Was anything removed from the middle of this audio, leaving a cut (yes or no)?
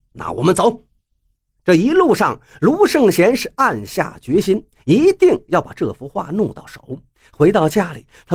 no